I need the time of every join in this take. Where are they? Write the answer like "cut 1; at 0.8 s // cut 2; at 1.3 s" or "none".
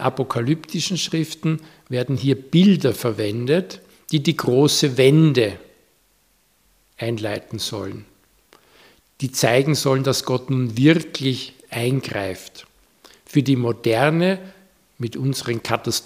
none